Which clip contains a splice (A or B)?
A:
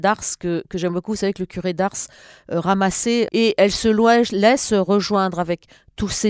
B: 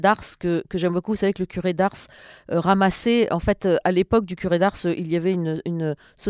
A